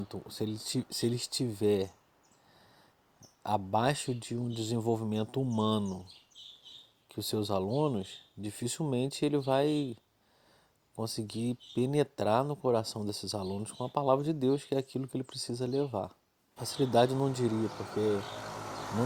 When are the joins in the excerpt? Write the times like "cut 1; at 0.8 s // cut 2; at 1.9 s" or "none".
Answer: cut 1; at 16.6 s